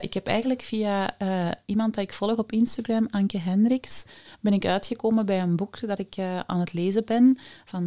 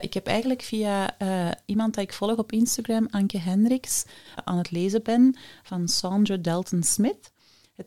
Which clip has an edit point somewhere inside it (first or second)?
second